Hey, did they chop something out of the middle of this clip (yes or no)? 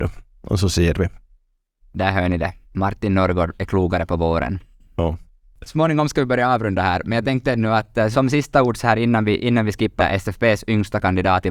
yes